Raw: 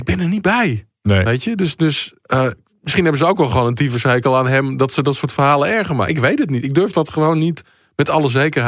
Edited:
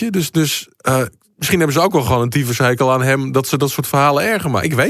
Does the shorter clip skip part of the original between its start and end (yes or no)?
no